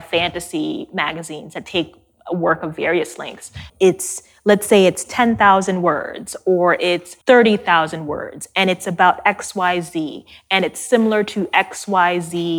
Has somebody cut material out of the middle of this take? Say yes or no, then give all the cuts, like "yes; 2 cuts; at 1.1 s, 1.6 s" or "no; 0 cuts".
yes; 2 cuts; at 3.7 s, 7.2 s